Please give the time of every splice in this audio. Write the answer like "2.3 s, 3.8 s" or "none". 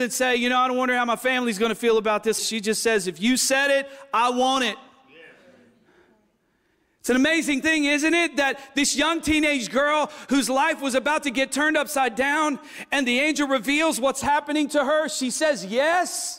2.4 s